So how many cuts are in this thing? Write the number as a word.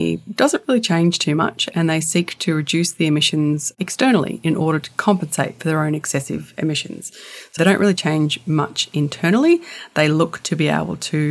one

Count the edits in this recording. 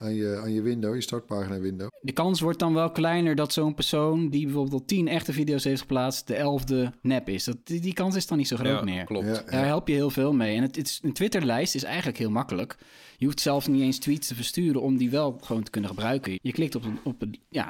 two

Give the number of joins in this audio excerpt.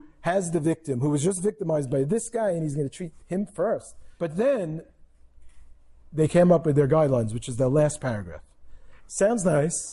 two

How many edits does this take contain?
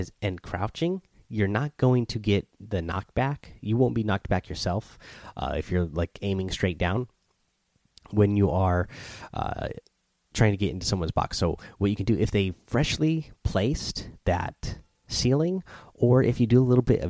zero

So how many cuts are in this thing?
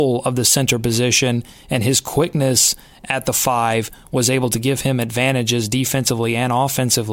zero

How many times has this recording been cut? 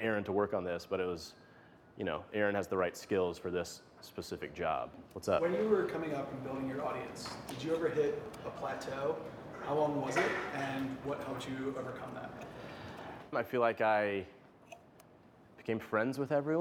two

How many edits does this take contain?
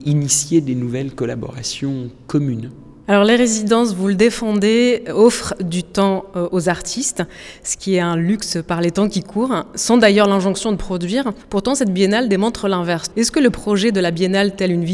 one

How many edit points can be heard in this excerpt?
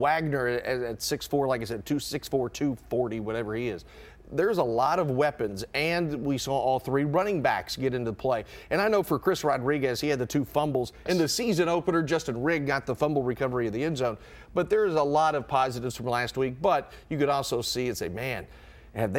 one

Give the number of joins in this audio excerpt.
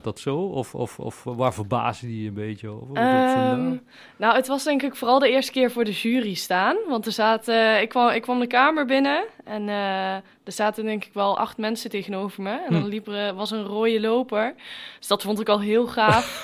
zero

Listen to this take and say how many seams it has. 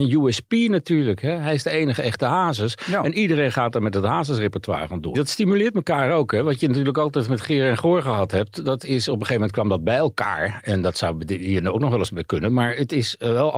one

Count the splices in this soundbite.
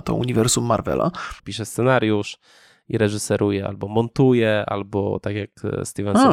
one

